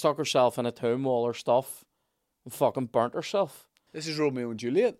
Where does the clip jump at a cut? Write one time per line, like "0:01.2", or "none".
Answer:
0:03.9